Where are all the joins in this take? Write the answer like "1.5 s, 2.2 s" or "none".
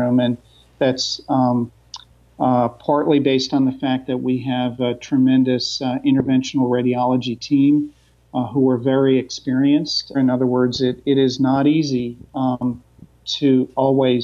10.1 s